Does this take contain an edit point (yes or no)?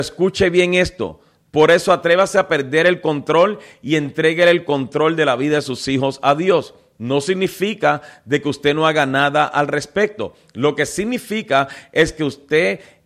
yes